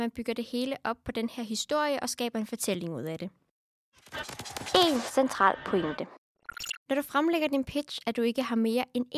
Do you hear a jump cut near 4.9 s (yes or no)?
no